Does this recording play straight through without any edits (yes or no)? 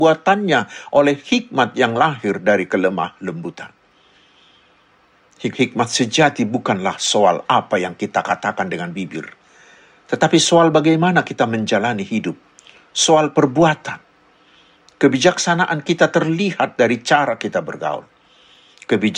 no